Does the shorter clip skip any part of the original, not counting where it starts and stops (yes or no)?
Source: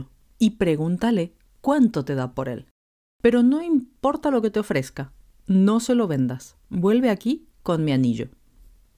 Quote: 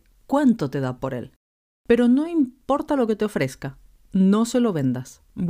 no